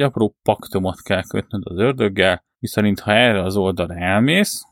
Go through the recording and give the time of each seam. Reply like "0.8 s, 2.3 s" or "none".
2.5 s

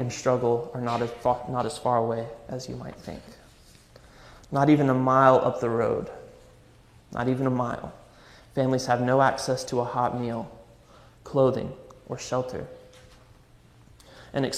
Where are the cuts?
none

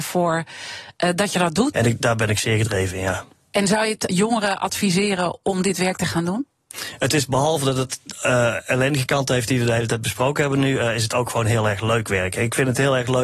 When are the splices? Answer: 1.7 s, 4.1 s

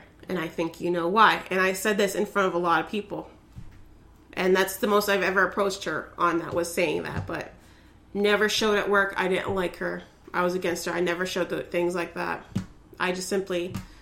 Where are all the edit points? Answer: 4.3 s

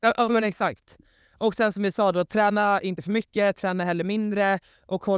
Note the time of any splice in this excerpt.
none

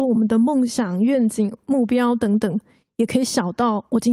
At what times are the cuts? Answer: none

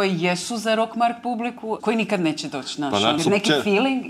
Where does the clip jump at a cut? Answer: 1.8 s, 3.2 s

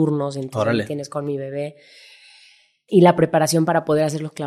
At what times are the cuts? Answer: 2.9 s

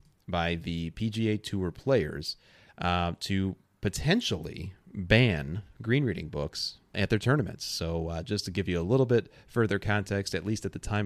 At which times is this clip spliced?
6.9 s

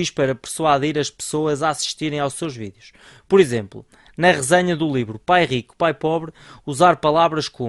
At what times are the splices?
none

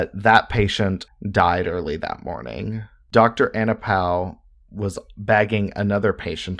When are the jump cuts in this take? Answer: 1.1 s, 3.1 s

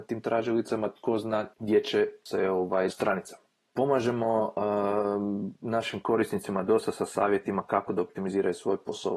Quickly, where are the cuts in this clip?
2.9 s

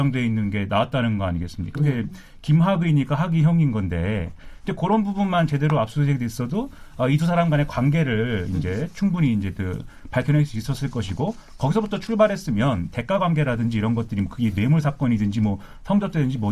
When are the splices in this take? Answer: 1.7 s

